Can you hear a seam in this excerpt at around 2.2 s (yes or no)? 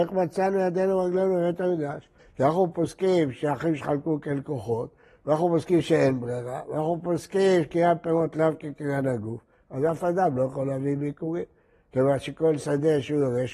yes